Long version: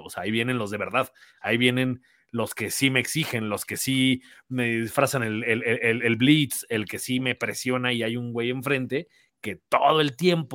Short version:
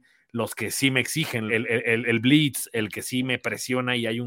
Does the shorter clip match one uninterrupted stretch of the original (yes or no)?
no